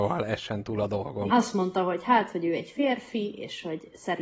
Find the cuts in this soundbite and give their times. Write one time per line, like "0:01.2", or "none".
0:01.3